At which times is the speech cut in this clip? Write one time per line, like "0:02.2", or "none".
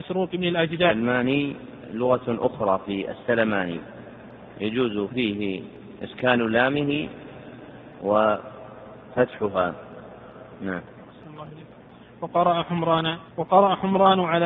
0:13.3